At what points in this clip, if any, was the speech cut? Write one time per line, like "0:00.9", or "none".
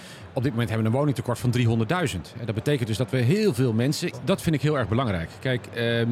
0:04.1